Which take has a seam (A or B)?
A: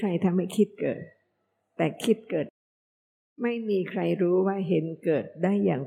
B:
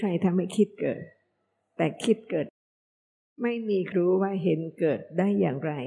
B